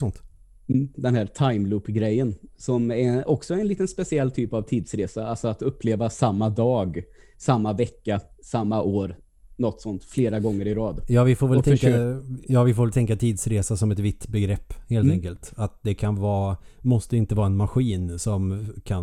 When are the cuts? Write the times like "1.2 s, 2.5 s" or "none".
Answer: 0.9 s